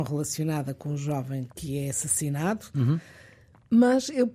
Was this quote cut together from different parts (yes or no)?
yes